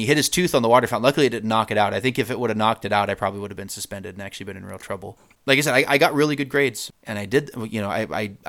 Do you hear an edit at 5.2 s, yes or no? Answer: yes